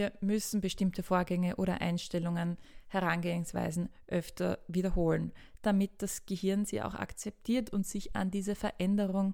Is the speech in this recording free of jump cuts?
yes; 0 cuts

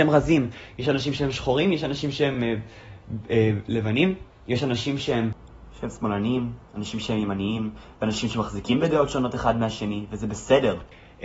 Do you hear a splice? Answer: no; 0 cuts

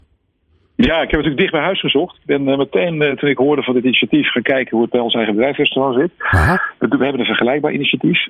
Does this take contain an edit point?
no; 0 cuts

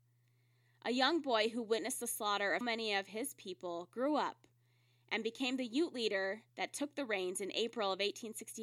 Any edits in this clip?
yes; 2 cuts; at 2.6 s, 6.5 s

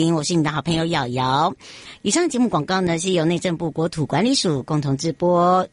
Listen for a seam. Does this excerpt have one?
no; 0 cuts

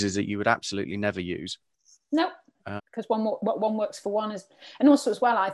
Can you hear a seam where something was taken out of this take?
yes; 1 cut; at 2.8 s

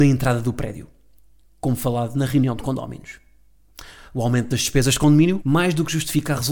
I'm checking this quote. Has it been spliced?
yes; 1 cut; at 5.4 s

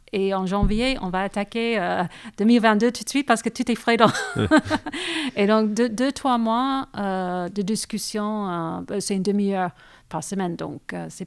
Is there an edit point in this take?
no; 0 cuts

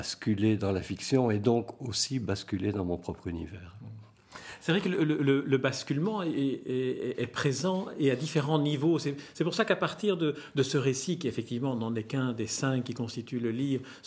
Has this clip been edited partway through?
no; 0 cuts

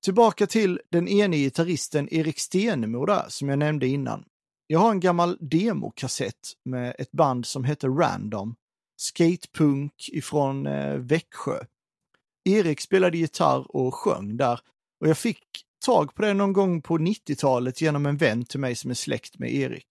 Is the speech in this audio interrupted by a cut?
no; 0 cuts

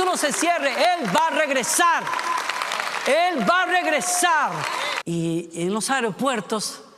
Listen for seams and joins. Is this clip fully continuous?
no; 1 cut; at 5.0 s

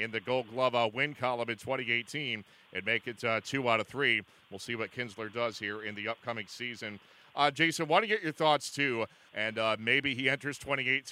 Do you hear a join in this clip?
yes; 1 cut; at 9.3 s

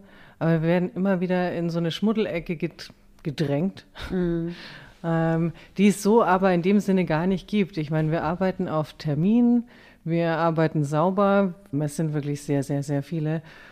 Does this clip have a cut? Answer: yes; 1 cut; at 11.7 s

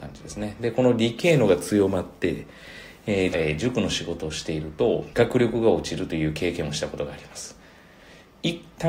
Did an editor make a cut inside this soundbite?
yes; 2 cuts; at 3.3 s, 5.1 s

